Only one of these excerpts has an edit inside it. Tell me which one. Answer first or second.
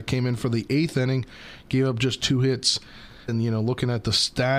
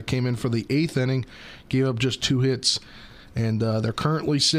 first